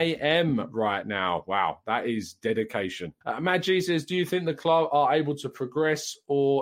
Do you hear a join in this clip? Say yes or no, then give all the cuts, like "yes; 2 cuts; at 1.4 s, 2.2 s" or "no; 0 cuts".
yes; 1 cut; at 3.2 s